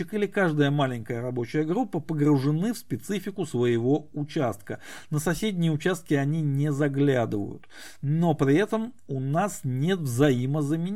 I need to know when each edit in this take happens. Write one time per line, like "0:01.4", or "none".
none